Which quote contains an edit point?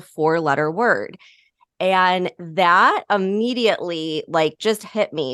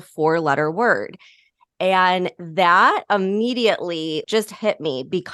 second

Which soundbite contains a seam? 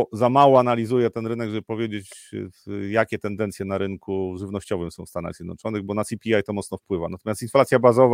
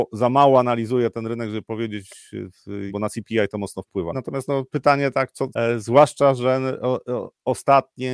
second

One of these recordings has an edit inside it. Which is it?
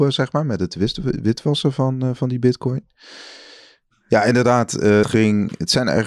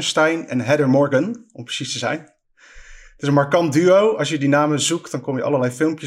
first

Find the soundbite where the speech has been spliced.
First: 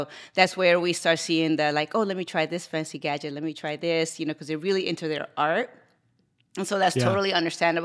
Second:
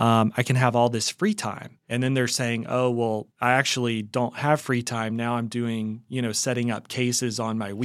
second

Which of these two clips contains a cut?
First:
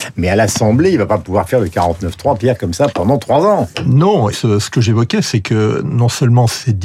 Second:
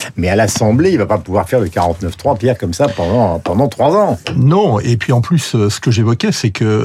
first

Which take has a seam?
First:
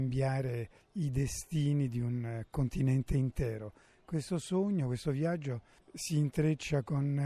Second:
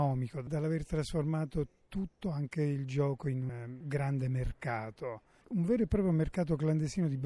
second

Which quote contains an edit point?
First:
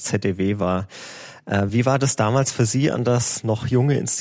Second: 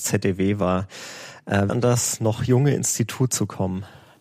second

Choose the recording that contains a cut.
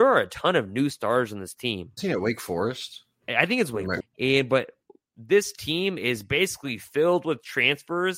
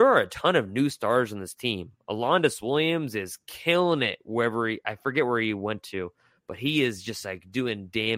first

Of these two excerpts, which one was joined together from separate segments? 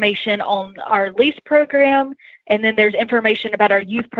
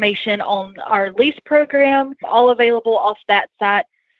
second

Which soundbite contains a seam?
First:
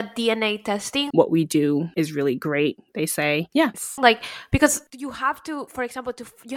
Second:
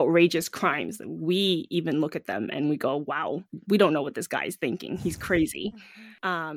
first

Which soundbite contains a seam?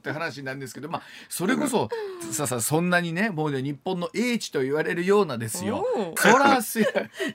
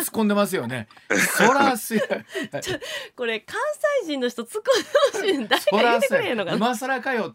first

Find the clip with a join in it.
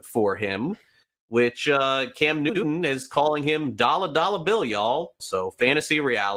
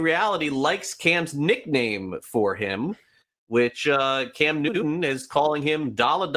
first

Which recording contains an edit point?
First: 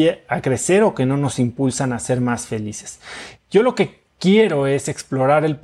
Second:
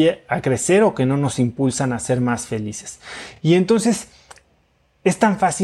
first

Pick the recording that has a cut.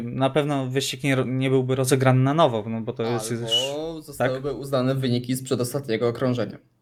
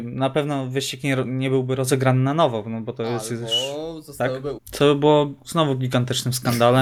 second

